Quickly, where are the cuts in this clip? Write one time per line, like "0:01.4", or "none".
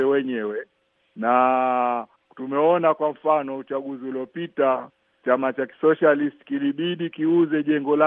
none